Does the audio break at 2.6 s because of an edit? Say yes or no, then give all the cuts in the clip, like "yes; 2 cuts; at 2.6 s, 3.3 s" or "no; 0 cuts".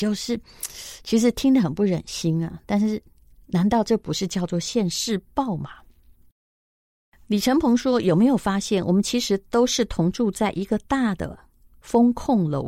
no; 0 cuts